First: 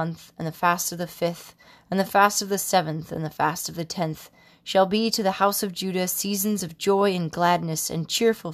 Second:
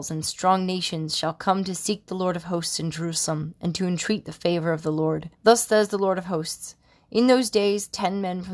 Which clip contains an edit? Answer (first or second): second